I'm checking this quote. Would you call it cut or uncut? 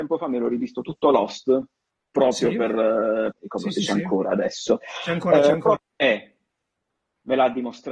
cut